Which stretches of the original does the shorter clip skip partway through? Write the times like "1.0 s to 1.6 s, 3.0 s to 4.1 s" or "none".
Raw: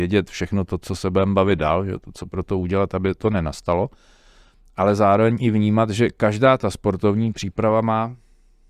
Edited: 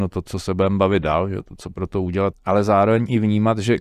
2.9 s to 4.6 s